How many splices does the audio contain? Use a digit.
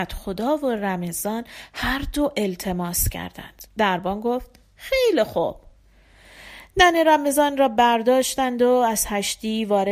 1